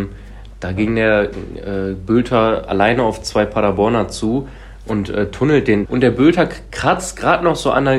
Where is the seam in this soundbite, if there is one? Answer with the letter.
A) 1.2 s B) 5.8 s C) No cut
B